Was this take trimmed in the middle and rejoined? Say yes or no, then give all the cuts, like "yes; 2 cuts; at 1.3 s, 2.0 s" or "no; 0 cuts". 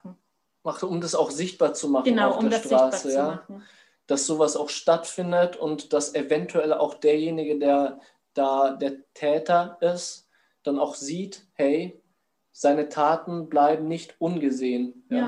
no; 0 cuts